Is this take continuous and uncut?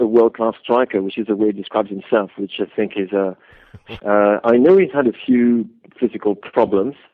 no; 1 cut; at 4.0 s

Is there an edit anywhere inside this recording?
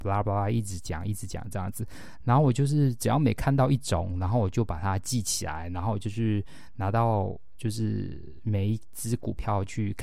no; 0 cuts

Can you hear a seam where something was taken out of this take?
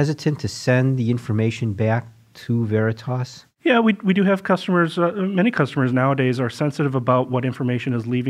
no; 0 cuts

